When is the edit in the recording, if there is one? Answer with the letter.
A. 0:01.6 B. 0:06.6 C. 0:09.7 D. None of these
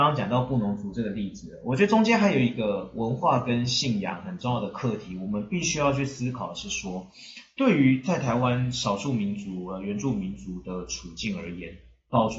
D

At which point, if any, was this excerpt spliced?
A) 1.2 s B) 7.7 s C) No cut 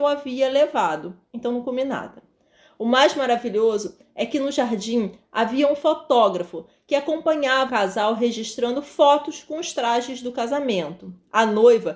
B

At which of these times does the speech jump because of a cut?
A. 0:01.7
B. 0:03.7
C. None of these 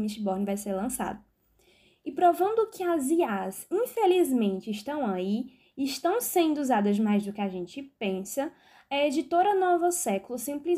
C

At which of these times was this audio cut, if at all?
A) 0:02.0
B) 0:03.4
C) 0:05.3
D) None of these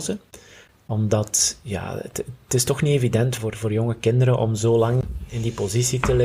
B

